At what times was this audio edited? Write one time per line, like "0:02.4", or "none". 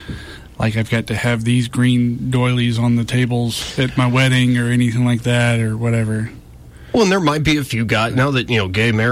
none